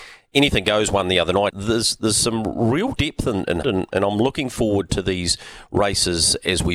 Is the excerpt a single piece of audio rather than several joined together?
no; 2 cuts; at 1.5 s, 3.6 s

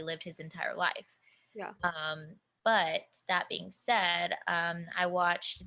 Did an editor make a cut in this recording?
no; 0 cuts

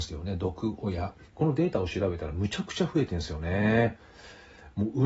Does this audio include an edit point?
yes; 1 cut; at 1.2 s

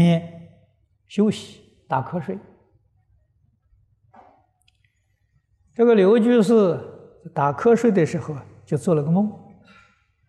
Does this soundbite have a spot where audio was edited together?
no; 0 cuts

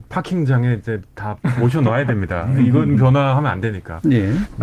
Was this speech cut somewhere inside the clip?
no; 0 cuts

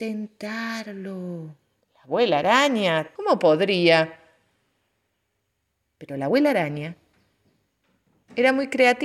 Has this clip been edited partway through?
yes; 2 cuts; at 1.8 s, 3.2 s

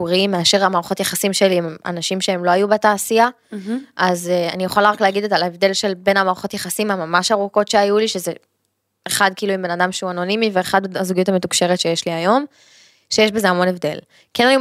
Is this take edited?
no; 0 cuts

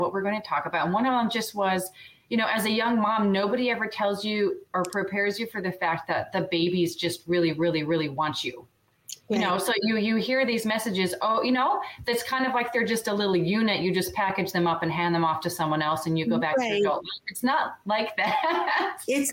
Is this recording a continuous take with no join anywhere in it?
yes; 0 cuts

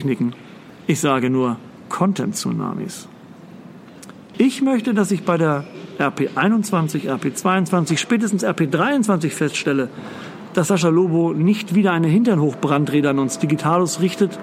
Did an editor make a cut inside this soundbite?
yes; 1 cut; at 4.3 s

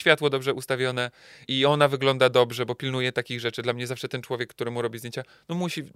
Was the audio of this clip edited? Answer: yes; 1 cut; at 1.4 s

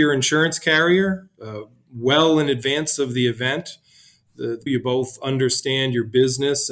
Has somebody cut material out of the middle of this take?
yes; 1 cut; at 4.7 s

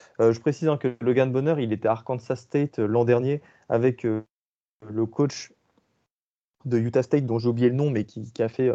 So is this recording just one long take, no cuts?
yes; 0 cuts

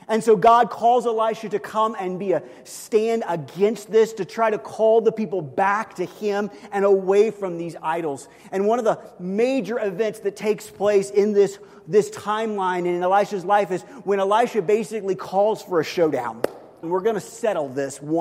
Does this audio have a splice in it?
yes; 1 cut; at 16.8 s

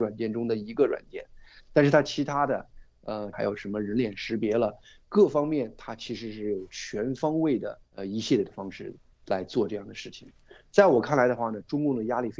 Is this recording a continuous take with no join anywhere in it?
no; 2 cuts; at 3.3 s, 7.9 s

